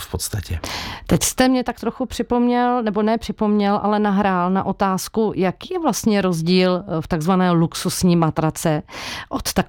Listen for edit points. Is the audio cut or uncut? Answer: uncut